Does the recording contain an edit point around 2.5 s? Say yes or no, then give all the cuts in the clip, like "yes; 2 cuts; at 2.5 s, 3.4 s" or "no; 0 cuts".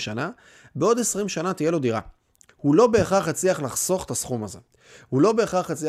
yes; 1 cut; at 2.5 s